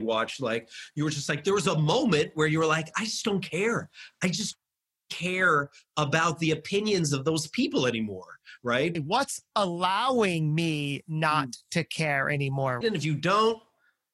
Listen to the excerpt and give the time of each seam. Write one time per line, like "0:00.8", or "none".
0:08.9
0:12.8